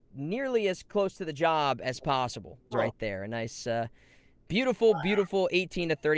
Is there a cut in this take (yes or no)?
yes